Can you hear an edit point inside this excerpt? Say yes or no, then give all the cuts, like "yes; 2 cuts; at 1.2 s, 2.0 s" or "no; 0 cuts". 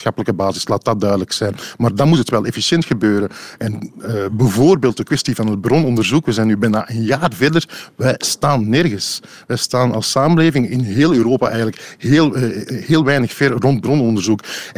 no; 0 cuts